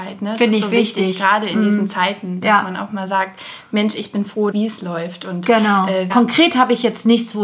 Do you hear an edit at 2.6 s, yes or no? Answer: no